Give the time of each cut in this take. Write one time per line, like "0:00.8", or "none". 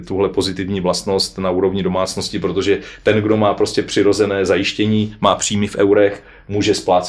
none